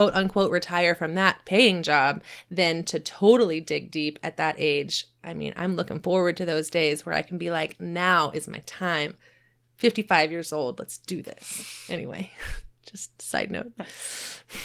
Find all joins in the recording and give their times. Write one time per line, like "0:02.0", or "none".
none